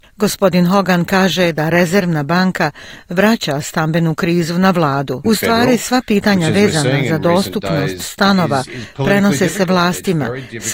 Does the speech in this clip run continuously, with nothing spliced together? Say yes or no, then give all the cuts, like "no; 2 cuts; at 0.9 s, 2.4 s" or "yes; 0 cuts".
no; 1 cut; at 5.2 s